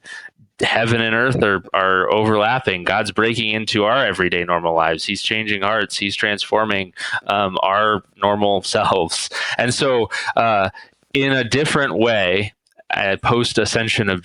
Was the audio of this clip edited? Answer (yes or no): no